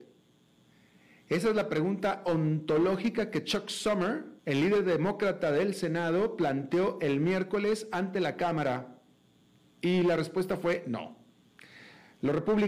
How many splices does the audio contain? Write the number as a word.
one